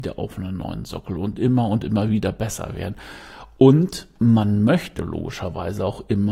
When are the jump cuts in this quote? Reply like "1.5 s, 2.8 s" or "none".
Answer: none